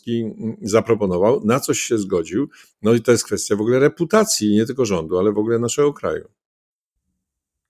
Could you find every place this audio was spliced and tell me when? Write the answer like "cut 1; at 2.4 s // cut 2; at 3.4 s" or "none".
none